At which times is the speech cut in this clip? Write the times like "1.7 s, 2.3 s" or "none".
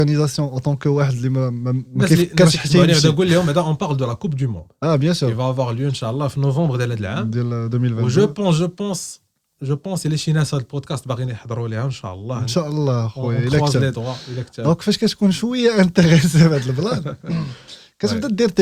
none